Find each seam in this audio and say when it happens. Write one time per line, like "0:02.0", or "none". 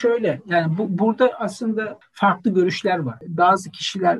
none